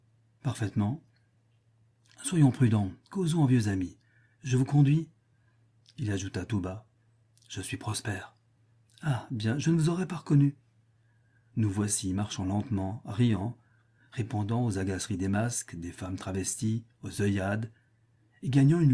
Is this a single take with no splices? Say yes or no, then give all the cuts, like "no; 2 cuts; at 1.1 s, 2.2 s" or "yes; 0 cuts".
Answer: yes; 0 cuts